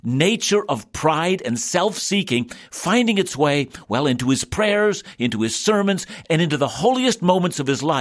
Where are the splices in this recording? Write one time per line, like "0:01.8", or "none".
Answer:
none

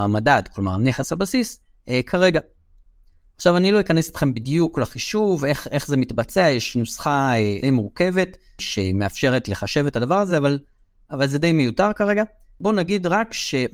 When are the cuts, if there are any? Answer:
none

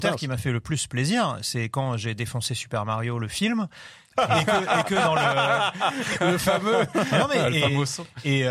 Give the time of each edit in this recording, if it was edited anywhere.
none

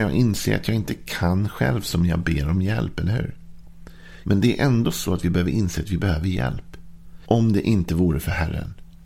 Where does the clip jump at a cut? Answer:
0:04.2
0:07.2

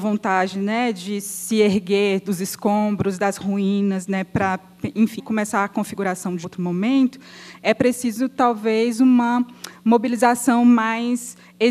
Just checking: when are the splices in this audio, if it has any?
0:05.2
0:06.4

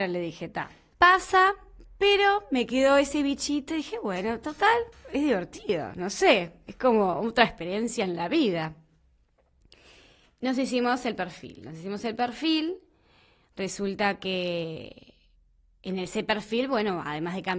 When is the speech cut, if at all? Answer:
0:00.9

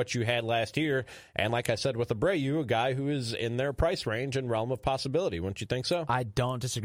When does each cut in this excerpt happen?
none

